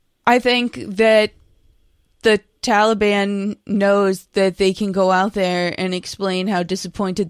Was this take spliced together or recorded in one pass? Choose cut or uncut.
uncut